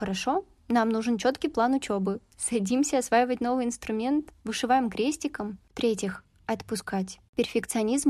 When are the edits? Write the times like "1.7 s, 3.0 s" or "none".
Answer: 4.4 s, 5.7 s

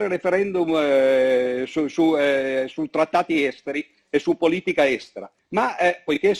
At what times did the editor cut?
5.4 s

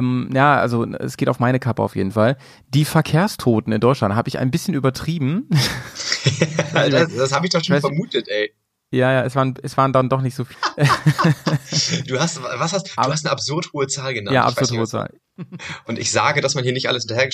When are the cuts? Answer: 10.5 s, 15.2 s

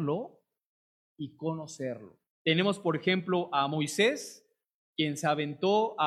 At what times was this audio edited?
2.3 s

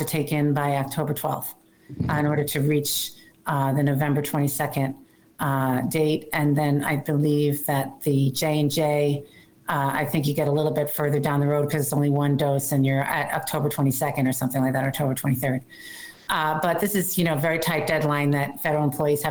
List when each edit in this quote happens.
none

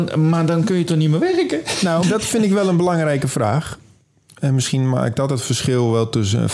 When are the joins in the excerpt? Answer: 2.0 s

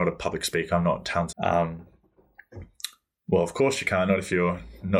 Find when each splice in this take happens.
1.3 s

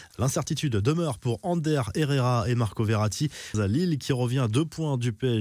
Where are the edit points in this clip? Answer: 3.5 s

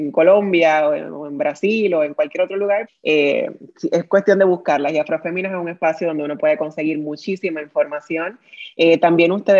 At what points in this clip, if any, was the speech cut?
2.9 s

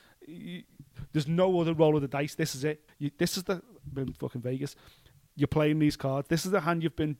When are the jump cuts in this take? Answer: 2.9 s

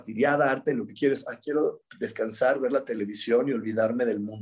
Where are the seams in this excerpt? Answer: none

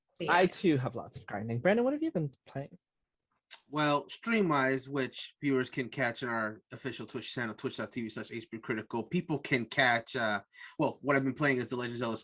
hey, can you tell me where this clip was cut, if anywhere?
none

